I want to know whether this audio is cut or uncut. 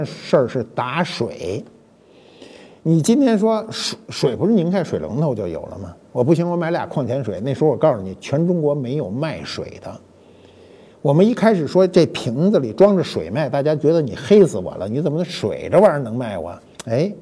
uncut